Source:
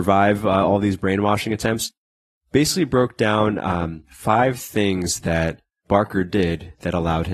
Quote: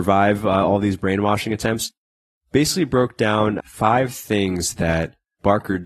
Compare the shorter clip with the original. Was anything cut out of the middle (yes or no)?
yes